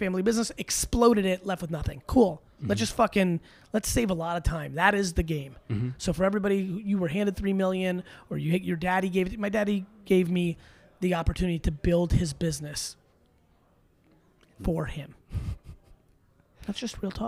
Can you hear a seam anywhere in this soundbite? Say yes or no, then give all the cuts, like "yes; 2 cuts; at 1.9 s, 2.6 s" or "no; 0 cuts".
no; 0 cuts